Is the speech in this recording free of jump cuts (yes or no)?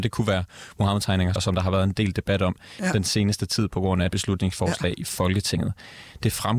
no